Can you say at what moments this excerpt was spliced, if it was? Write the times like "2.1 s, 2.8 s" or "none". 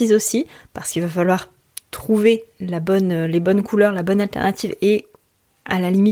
none